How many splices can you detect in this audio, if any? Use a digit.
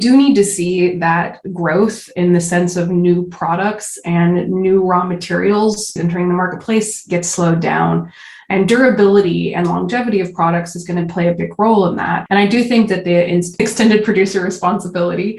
2